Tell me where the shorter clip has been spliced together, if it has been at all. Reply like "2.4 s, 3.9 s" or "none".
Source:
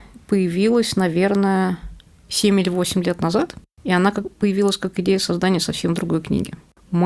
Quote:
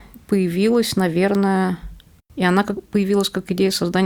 2.2 s